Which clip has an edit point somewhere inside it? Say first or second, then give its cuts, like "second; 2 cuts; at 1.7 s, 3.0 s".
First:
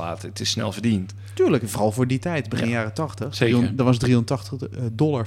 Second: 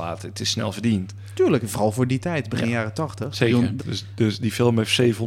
second; 1 cut; at 3.8 s